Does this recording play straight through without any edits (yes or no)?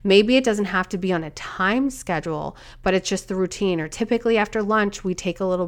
yes